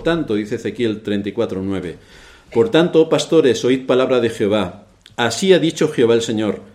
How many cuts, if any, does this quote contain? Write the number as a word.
zero